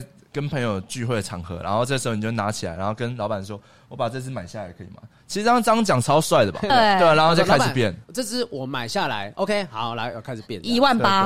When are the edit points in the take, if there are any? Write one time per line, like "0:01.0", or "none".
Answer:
0:06.7